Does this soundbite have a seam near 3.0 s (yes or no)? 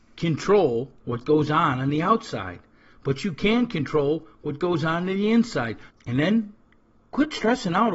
no